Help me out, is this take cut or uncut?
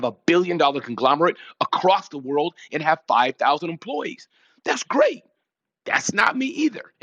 uncut